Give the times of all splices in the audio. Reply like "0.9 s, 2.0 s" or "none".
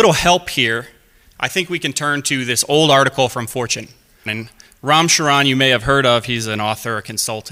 4.3 s